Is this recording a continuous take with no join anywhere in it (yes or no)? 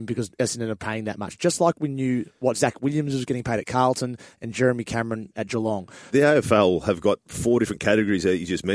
no